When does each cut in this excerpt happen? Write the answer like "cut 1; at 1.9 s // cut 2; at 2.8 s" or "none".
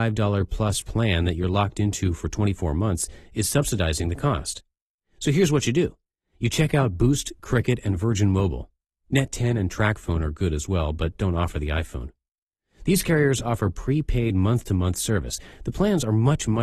none